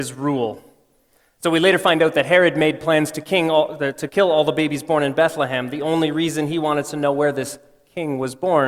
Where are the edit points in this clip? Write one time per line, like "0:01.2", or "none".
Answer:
none